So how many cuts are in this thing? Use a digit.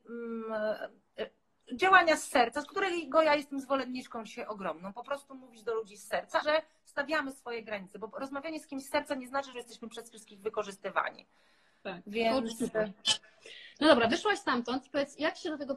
2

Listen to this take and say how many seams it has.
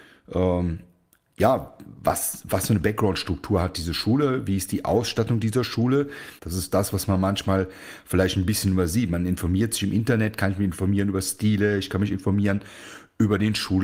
1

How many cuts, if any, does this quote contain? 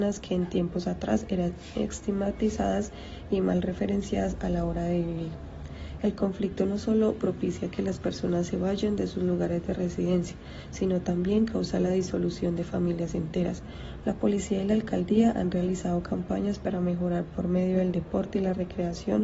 2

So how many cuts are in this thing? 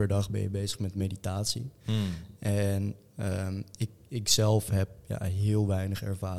0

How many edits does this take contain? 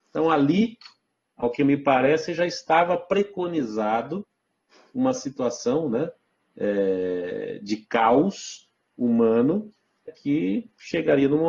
1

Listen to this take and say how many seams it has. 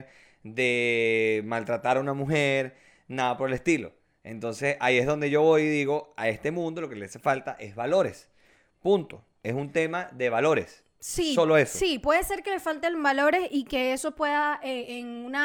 0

